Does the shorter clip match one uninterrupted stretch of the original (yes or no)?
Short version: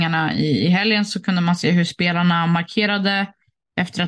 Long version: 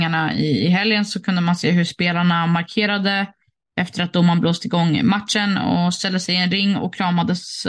yes